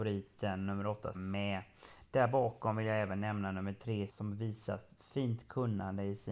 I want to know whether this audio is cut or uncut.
cut